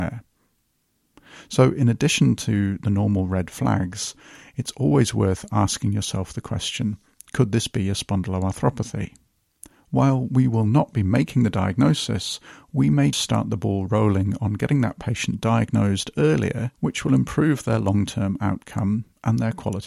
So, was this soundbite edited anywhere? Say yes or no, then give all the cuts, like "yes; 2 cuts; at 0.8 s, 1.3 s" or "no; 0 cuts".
yes; 2 cuts; at 13.1 s, 16.7 s